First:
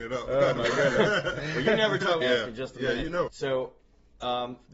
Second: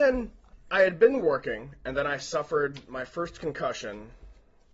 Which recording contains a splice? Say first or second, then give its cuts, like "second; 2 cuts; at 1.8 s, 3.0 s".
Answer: first; 2 cuts; at 2.2 s, 3.3 s